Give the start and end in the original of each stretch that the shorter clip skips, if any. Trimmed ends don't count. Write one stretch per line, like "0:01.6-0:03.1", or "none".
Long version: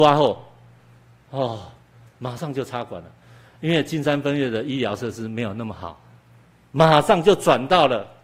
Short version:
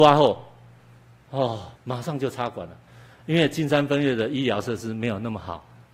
0:01.8-0:02.1